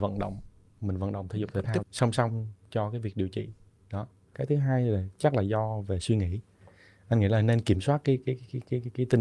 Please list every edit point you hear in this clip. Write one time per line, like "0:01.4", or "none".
0:01.8

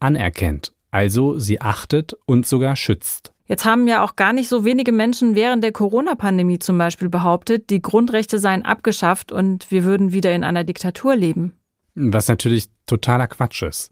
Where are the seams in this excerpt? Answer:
0:03.4

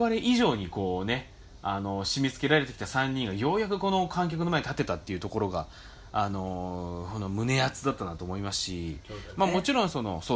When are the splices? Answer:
none

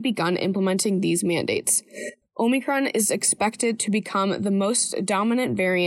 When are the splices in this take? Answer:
0:02.2

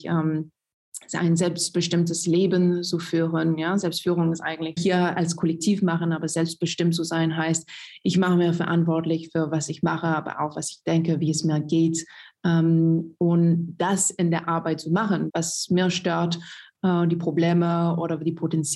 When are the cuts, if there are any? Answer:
0:04.8
0:15.3

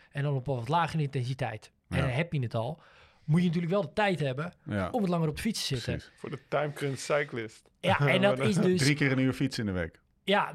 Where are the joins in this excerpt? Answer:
none

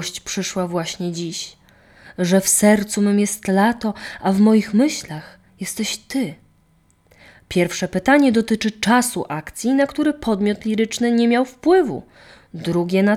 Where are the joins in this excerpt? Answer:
none

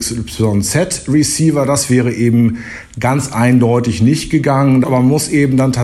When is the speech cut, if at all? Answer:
0:04.8

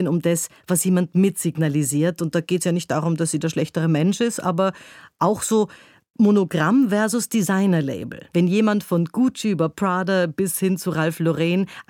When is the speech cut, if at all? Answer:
0:08.3

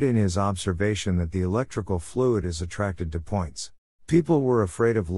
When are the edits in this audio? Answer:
0:03.9

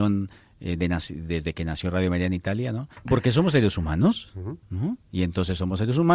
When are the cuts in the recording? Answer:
0:03.1

